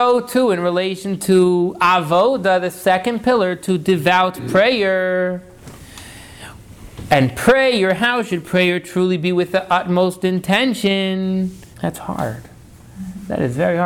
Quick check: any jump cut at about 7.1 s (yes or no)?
no